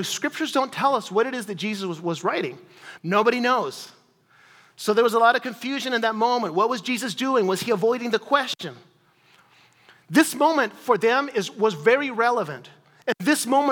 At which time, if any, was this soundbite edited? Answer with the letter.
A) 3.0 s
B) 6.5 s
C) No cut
A